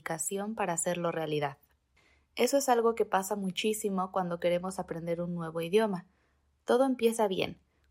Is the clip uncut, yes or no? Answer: yes